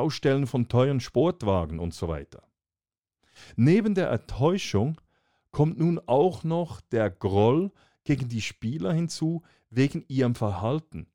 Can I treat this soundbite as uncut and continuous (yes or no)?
yes